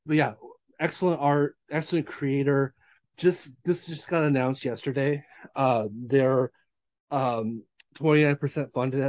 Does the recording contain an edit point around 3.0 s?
no; 1 cut; at 1.6 s

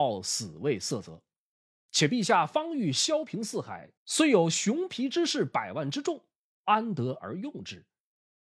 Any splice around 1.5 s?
no; 1 cut; at 4.0 s

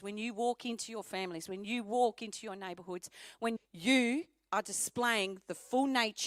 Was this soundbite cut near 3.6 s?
yes; 1 cut; at 3.6 s

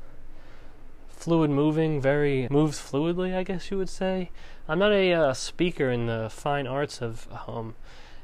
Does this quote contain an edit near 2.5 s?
yes; 1 cut; at 2.5 s

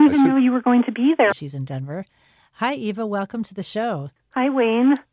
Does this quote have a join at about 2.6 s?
no; 2 cuts; at 1.3 s, 4.2 s

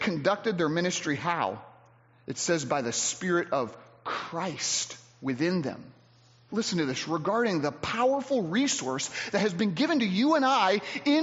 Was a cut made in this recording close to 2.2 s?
no; 1 cut; at 6.5 s

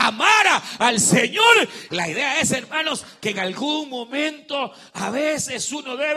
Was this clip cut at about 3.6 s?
no; 1 cut; at 1.9 s

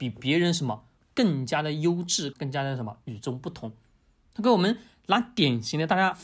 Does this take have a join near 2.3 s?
yes; 1 cut; at 2.3 s

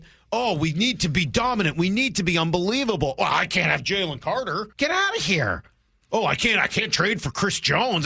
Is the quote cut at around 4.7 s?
yes; 1 cut; at 4.7 s

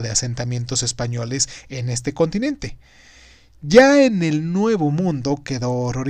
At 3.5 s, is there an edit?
no; 0 cuts

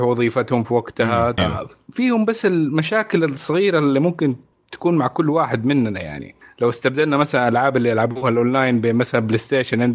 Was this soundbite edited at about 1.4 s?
yes; 1 cut; at 1.4 s

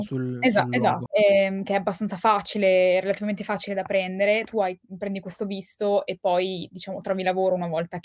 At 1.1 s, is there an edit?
yes; 1 cut; at 1.1 s

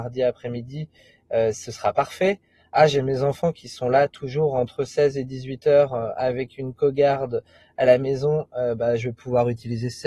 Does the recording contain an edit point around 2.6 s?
no; 0 cuts

